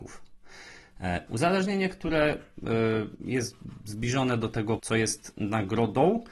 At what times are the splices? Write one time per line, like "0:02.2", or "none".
0:01.3
0:04.8